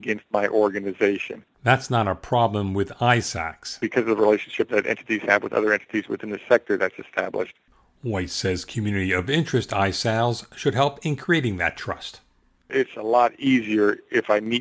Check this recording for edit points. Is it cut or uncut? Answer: cut